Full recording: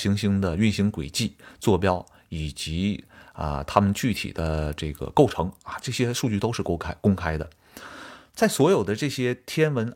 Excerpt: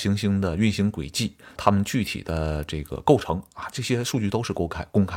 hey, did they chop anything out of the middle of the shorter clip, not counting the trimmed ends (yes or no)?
yes